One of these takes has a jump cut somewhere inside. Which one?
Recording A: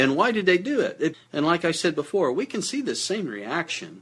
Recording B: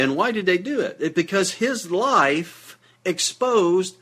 A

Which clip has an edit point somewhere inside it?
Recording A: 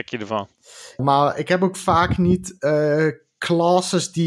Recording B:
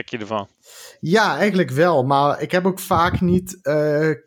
A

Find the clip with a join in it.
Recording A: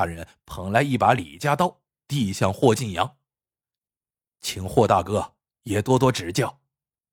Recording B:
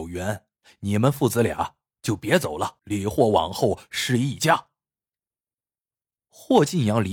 B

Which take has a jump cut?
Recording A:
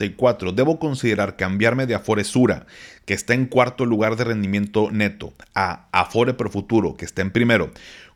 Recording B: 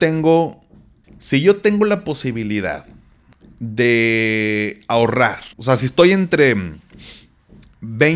B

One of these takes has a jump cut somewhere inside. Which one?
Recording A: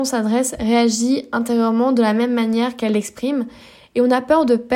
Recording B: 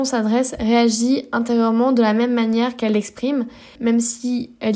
B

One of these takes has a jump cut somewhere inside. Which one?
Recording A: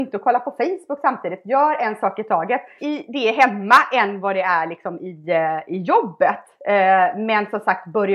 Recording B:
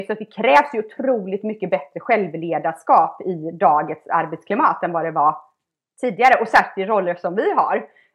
A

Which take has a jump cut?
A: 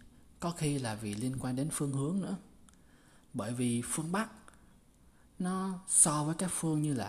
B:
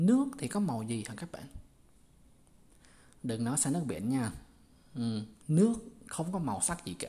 B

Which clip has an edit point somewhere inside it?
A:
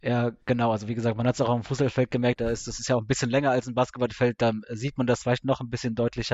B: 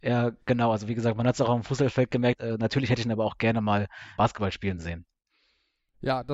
B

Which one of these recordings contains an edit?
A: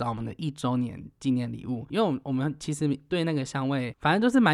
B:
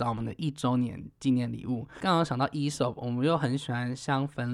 A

